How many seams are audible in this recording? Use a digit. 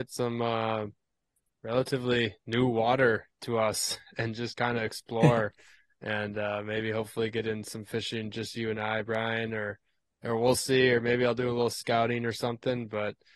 0